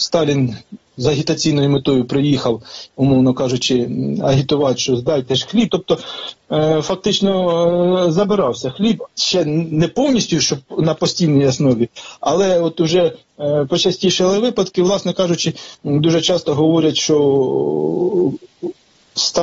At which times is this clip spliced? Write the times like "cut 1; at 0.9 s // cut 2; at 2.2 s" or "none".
cut 1; at 5.7 s